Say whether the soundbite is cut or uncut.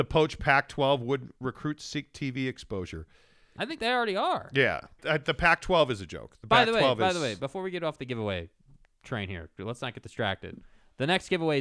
cut